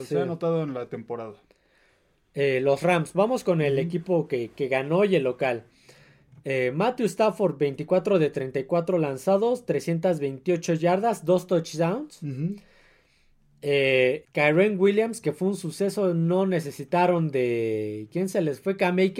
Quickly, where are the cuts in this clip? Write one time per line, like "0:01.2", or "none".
0:14.2